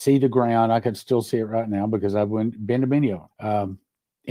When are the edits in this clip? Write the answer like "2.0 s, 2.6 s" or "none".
3.3 s